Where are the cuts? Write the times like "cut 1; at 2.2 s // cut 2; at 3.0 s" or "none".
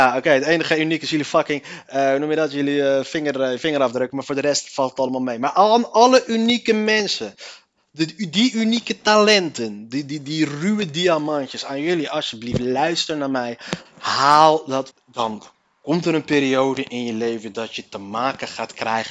cut 1; at 13.9 s // cut 2; at 14.9 s

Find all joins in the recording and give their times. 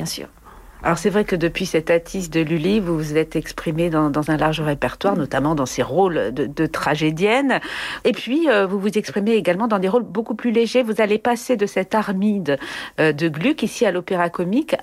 none

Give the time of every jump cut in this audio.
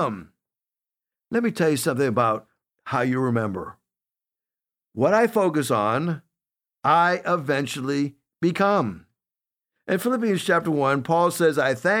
none

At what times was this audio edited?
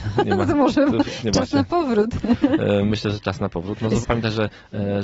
cut 1; at 4.0 s

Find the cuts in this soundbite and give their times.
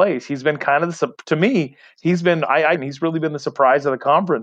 cut 1; at 2.7 s

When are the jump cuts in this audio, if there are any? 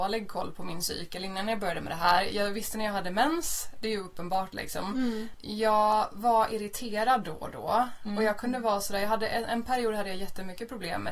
none

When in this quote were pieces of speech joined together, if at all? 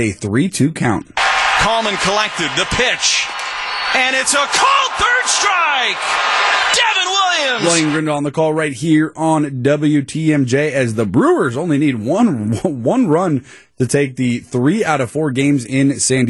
none

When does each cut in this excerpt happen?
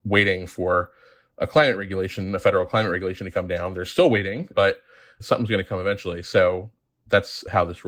none

